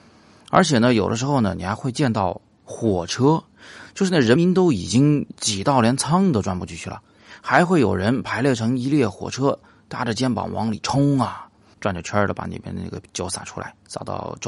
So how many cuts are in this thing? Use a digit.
2